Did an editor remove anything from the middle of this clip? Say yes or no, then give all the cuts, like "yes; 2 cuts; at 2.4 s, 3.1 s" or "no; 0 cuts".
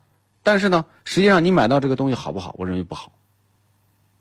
no; 0 cuts